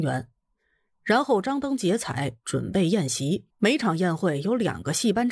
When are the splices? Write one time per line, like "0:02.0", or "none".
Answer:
0:03.5